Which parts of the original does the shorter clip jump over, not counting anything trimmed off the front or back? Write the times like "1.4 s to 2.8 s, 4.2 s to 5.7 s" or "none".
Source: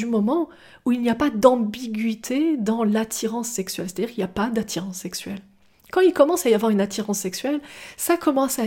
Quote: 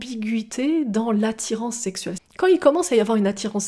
3.9 s to 5.7 s

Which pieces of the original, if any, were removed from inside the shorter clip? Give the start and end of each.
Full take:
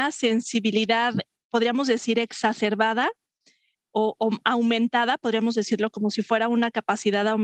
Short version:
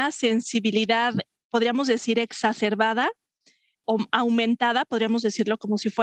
3.8 s to 4.2 s

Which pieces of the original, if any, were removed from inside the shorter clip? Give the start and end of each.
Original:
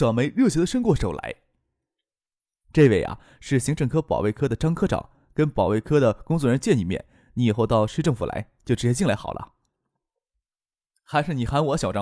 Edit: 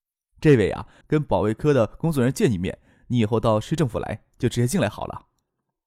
3.3 s to 5.3 s

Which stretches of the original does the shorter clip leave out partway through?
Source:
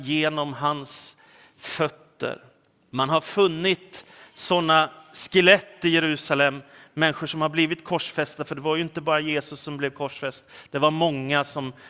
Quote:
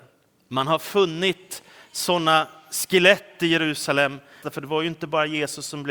6.8 s to 8.4 s

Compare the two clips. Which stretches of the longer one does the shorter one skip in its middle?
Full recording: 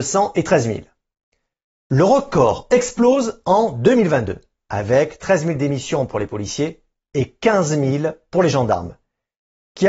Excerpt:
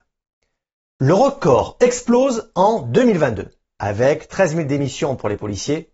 none

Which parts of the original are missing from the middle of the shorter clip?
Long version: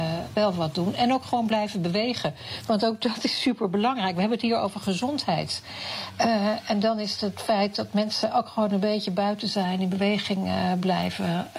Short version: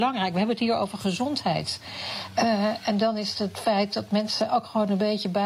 none

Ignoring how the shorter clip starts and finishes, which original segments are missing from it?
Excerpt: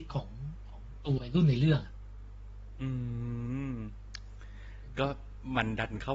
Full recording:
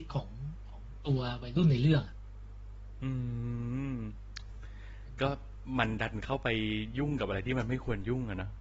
1.2 s to 1.4 s

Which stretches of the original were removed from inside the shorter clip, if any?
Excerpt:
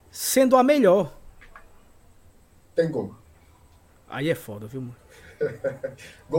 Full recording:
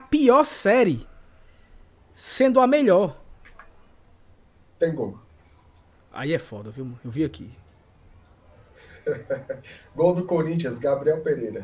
7.0 s to 8.6 s

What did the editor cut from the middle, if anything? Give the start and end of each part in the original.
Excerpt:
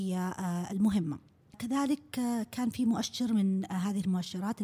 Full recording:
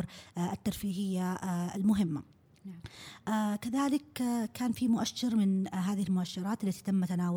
2.6 s to 3.6 s

